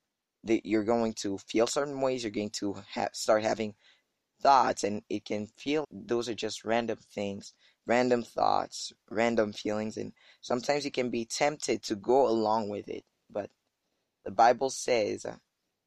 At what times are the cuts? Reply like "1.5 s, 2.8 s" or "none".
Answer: 5.8 s